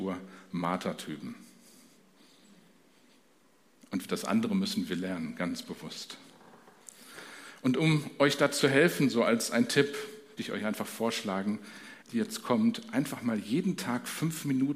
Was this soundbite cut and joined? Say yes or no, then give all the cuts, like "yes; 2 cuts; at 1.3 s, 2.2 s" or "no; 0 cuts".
yes; 2 cuts; at 10.4 s, 12.0 s